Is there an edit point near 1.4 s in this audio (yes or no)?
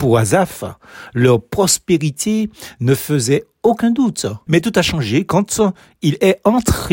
no